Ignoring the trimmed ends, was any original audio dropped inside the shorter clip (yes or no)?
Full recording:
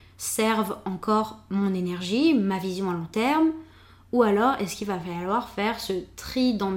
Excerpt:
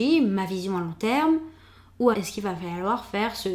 yes